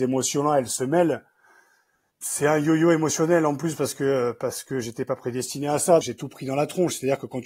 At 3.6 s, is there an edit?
no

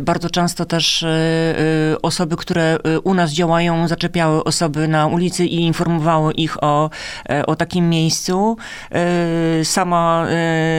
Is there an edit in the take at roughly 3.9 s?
no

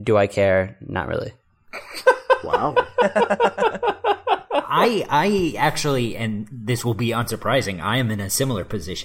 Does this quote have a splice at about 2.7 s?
no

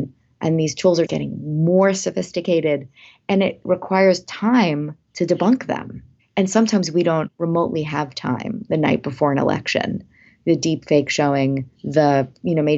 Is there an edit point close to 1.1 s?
yes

